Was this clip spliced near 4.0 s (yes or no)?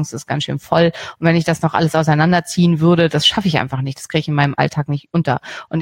no